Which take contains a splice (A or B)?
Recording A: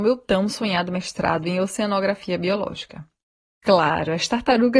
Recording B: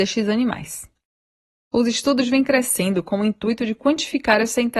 A